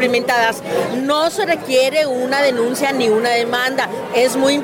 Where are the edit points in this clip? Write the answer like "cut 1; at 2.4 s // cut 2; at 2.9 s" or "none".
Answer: none

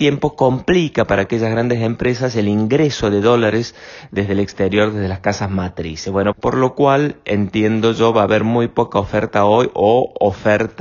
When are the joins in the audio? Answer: cut 1; at 6.3 s

